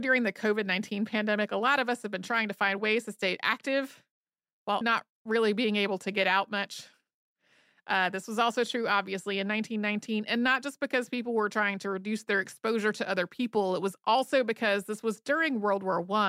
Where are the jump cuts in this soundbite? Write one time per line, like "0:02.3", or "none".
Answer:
0:04.8